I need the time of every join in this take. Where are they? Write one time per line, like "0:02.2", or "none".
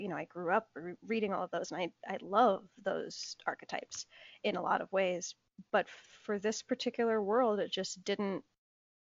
none